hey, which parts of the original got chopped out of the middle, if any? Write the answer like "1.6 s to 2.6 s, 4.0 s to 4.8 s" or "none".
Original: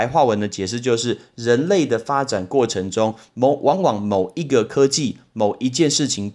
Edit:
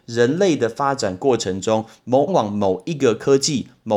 3.6 s to 3.8 s